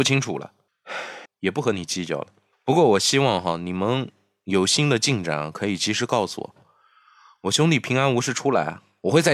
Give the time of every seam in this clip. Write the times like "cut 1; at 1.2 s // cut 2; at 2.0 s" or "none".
cut 1; at 1.2 s

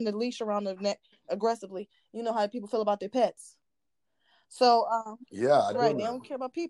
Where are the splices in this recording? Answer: none

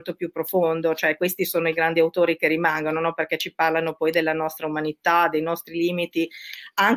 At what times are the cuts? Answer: none

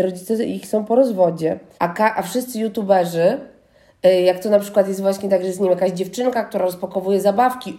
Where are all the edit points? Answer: cut 1; at 1.7 s

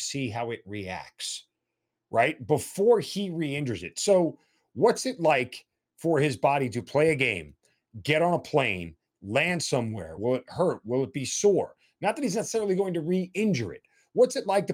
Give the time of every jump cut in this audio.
cut 1; at 10.2 s

